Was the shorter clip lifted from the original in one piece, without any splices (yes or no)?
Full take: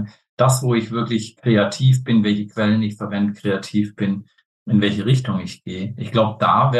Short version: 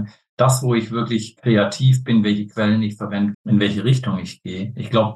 no